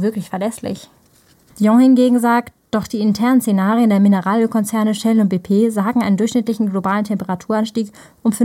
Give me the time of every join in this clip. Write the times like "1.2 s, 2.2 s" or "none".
1.5 s

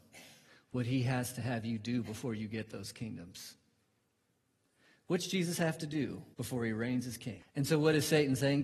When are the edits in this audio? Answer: 6.3 s, 7.4 s

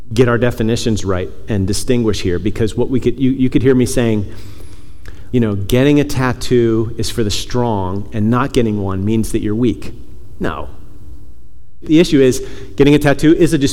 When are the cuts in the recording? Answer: 5.3 s, 11.8 s

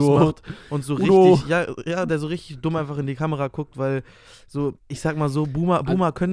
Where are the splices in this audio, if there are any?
4.8 s

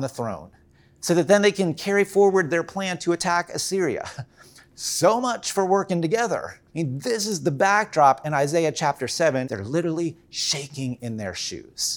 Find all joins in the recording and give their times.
6.7 s, 9.4 s

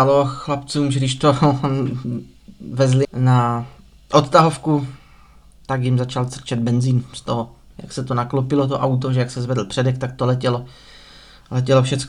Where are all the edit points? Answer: 3.0 s, 7.7 s

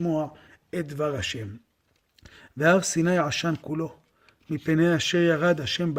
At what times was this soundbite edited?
none

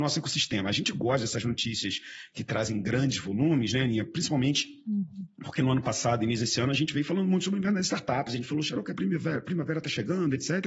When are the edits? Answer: none

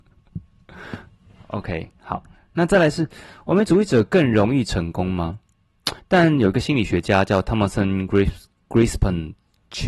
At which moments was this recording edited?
6.0 s

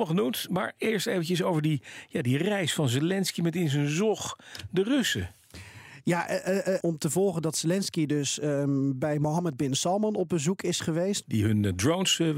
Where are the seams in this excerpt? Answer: 6.8 s, 11.2 s

